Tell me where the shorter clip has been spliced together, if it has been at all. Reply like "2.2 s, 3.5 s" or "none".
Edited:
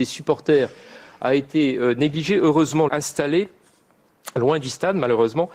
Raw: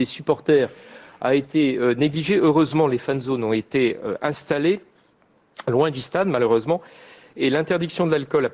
2.9 s

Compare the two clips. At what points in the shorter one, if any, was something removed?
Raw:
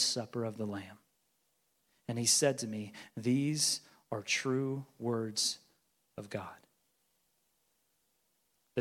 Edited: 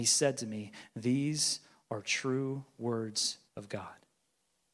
3.5 s

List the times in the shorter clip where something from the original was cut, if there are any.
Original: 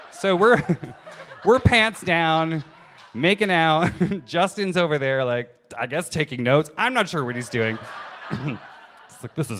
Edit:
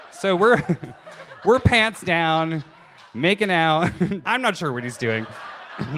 4.2 s

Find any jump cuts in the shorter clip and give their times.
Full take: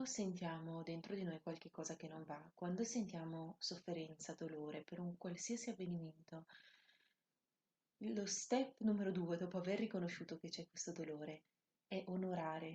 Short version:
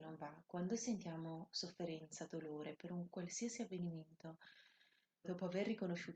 5.2 s

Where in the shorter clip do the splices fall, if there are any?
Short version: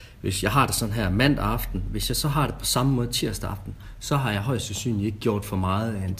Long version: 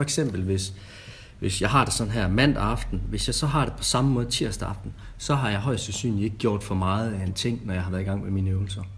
none

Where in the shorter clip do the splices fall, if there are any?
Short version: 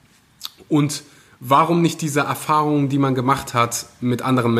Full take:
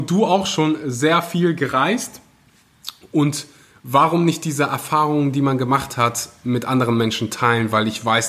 none

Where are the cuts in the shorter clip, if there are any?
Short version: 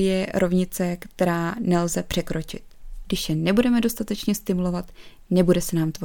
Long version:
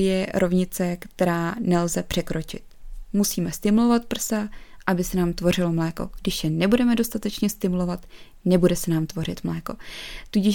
3.0 s

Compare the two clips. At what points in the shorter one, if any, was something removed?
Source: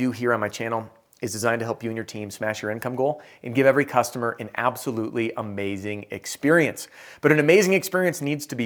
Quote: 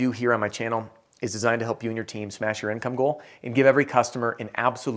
none

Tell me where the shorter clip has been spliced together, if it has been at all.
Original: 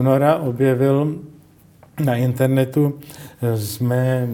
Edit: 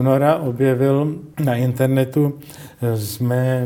1.3 s

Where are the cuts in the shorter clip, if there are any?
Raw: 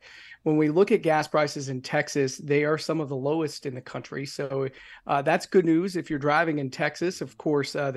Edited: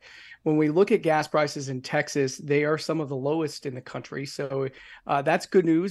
none

